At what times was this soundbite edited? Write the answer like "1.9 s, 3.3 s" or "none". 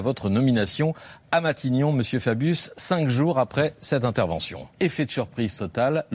4.7 s